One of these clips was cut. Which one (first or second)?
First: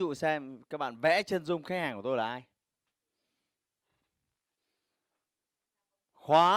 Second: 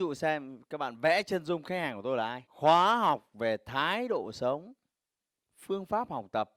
second